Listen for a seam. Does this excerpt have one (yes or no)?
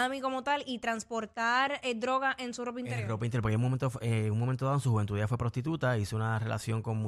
no